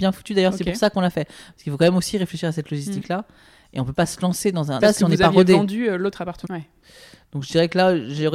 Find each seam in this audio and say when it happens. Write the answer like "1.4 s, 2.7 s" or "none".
4.8 s, 6.4 s